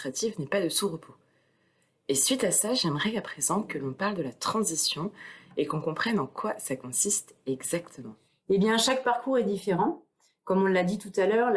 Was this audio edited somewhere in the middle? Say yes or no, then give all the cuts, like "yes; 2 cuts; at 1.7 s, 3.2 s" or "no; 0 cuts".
no; 0 cuts